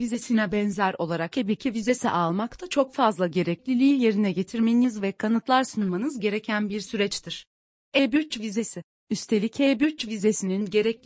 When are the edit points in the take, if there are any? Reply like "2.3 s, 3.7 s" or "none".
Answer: 7.7 s, 9.0 s